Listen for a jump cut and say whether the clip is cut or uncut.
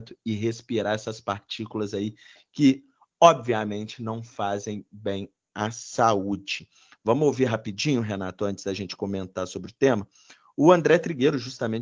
uncut